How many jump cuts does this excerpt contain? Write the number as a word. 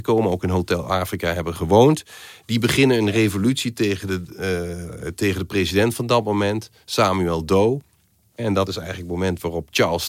zero